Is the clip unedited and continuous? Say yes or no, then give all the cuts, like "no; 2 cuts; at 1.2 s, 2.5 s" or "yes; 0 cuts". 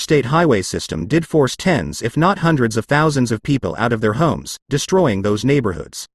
no; 1 cut; at 4.6 s